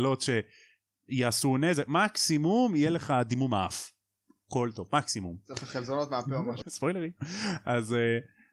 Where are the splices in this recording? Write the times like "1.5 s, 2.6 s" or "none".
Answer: 6.6 s